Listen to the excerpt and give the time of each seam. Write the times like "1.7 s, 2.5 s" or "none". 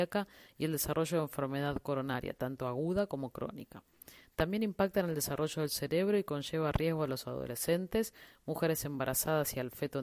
none